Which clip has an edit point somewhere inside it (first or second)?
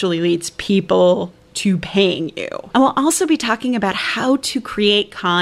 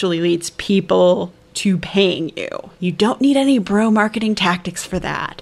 first